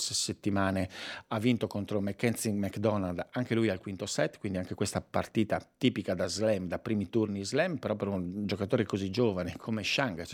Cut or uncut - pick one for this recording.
uncut